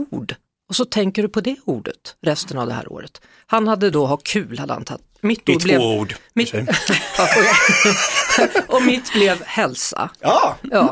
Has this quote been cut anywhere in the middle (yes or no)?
no